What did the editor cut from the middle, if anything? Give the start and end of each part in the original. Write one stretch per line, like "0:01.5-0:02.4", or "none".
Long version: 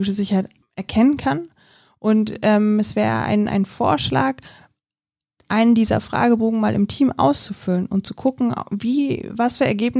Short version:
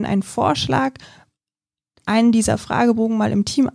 none